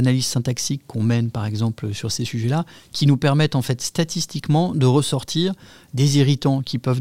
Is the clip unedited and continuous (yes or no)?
yes